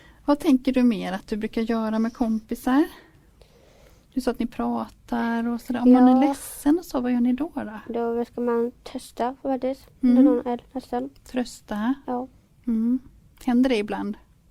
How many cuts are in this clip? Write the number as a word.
one